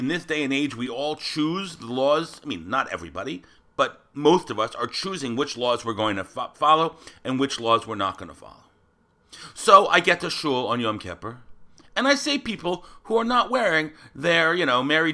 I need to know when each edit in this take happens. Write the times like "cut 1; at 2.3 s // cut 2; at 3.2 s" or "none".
none